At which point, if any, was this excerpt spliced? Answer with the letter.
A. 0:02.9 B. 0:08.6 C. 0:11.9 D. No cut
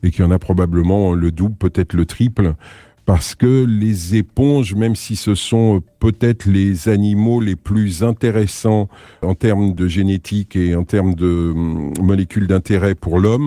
D